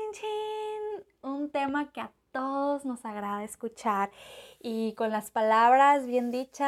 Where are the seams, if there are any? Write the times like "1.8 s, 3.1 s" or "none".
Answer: none